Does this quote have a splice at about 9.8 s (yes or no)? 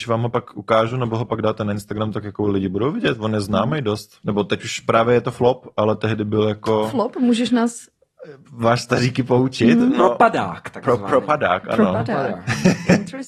no